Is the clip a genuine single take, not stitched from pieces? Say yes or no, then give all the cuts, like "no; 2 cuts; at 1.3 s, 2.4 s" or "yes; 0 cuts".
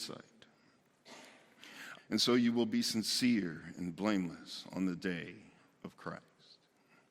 no; 1 cut; at 1.9 s